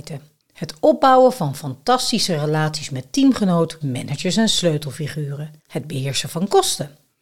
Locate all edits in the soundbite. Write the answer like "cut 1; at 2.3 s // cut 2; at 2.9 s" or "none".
cut 1; at 3.8 s // cut 2; at 5.6 s

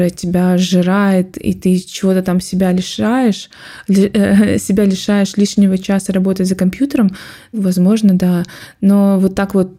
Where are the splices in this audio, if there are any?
cut 1; at 7.5 s

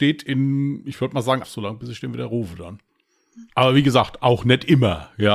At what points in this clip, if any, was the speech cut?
cut 1; at 1.4 s // cut 2; at 3.5 s

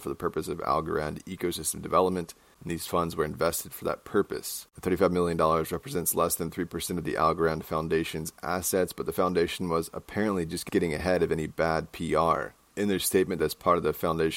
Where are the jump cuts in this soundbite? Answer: cut 1; at 4.7 s // cut 2; at 13.4 s

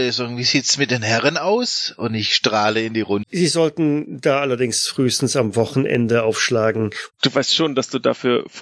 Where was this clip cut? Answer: cut 1; at 3.2 s // cut 2; at 7.1 s

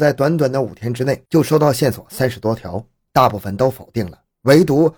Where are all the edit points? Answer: cut 1; at 3.1 s

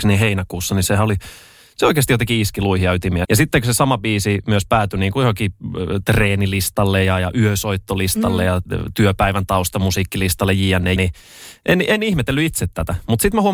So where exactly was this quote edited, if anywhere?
cut 1; at 3.2 s // cut 2; at 11.0 s

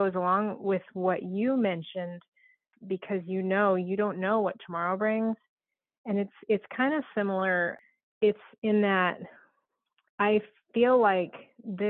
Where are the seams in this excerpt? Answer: cut 1; at 2.7 s

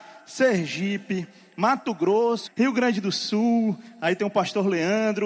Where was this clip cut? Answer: cut 1; at 2.5 s

